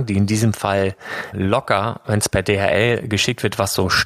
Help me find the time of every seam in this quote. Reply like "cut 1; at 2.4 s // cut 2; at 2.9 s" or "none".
cut 1; at 1.3 s